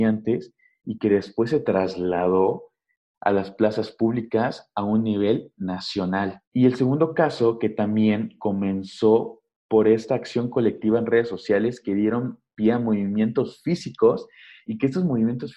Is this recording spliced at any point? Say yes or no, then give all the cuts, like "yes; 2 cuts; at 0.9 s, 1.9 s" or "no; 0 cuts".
yes; 1 cut; at 6.4 s